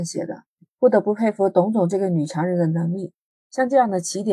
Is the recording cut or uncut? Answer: cut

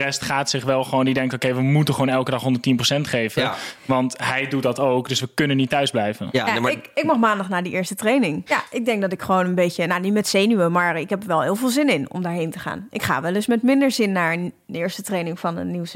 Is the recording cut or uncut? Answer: cut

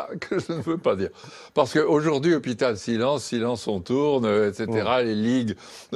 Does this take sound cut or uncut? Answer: uncut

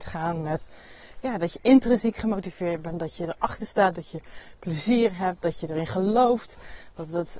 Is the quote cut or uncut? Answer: cut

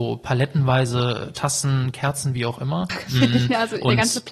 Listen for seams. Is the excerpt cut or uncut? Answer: cut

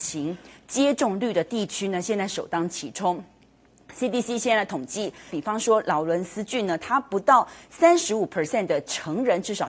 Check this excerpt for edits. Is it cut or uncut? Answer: cut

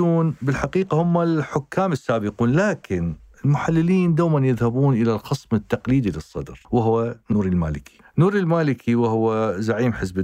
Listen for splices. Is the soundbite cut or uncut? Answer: cut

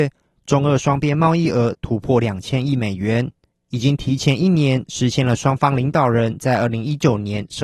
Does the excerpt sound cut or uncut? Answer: uncut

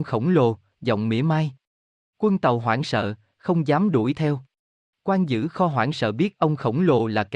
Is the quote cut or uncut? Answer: cut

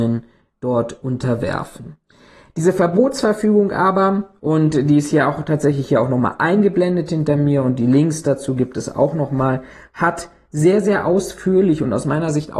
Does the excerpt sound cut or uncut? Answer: uncut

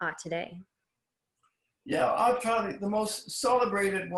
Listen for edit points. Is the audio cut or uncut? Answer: uncut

